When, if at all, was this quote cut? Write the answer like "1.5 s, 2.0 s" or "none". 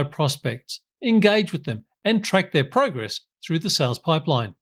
none